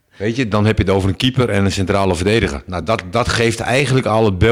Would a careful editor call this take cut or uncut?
uncut